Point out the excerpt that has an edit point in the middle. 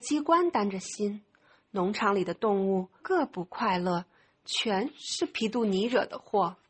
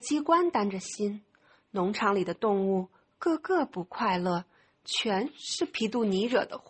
first; 1 cut; at 3.0 s

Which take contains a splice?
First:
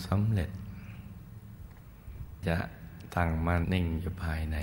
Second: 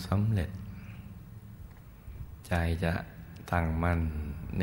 first; 2 cuts; at 2.4 s, 3.6 s

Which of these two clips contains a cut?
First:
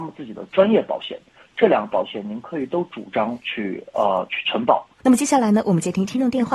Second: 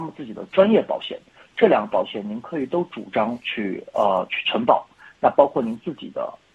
first; 1 cut; at 5.0 s

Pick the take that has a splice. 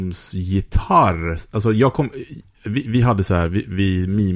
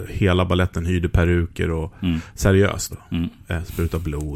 second; 1 cut; at 2.9 s

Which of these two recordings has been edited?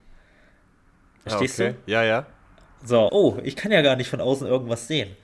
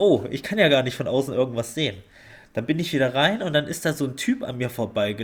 first; 1 cut; at 3.1 s

